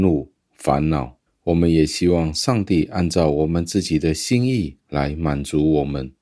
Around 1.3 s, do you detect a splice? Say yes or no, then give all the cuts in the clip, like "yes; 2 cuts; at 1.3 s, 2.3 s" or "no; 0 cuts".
yes; 1 cut; at 1.3 s